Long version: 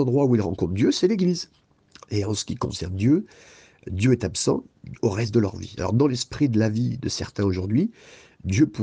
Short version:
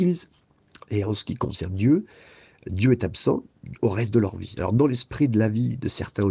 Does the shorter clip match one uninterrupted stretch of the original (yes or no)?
yes